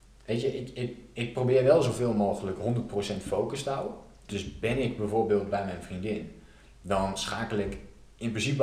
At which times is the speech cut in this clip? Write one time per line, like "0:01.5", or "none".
0:04.3